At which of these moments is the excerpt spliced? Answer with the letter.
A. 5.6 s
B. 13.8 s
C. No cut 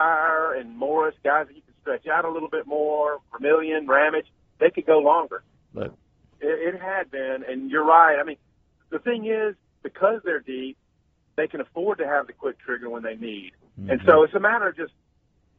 A